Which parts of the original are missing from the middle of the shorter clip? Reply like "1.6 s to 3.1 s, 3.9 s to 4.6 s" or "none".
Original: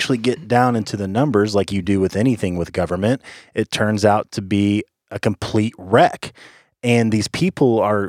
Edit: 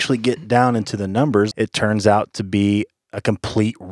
1.5 s to 3.5 s